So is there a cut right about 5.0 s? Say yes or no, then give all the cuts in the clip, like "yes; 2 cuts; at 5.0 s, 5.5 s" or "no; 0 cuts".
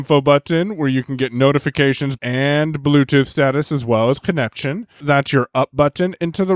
yes; 2 cuts; at 2.2 s, 5.0 s